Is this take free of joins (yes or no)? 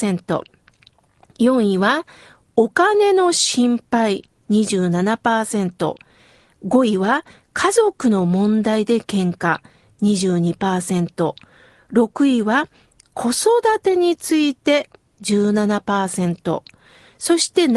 yes